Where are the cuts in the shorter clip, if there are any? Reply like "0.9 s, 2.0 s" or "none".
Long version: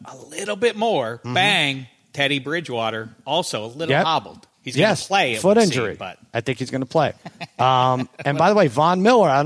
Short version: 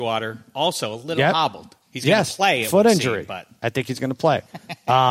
none